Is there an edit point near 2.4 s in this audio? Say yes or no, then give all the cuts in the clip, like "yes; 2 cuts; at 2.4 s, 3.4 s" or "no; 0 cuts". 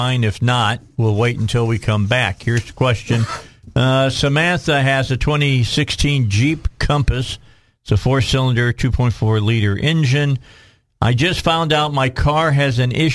no; 0 cuts